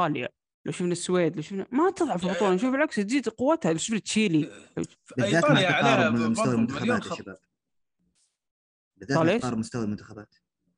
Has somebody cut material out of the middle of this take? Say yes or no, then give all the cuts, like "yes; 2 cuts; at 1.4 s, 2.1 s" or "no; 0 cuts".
no; 0 cuts